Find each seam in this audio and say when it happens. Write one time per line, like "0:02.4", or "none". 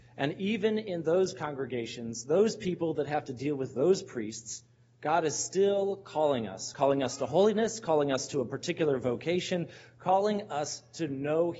none

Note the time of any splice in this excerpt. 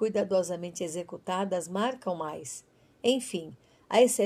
none

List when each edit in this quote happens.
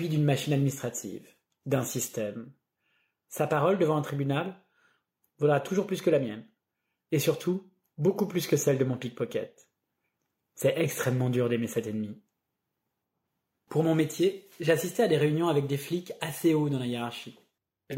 none

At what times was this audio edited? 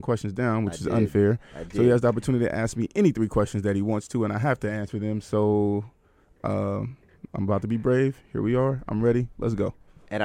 none

